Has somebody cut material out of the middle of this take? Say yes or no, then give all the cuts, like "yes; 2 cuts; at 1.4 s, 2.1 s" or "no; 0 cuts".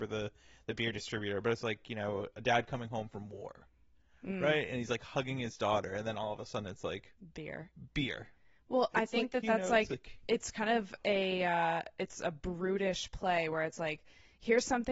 no; 0 cuts